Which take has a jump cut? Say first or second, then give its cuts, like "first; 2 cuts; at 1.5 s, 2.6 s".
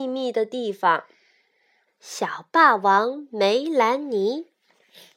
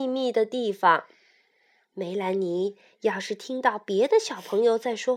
first; 1 cut; at 1.9 s